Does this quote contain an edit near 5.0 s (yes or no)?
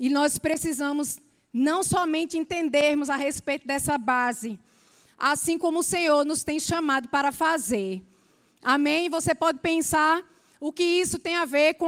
yes